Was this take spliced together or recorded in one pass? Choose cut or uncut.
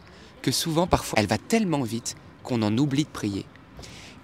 cut